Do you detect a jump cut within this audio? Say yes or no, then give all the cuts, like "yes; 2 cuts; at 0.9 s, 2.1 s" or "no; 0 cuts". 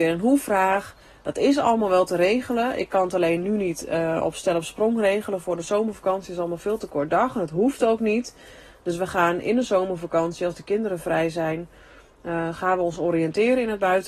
no; 0 cuts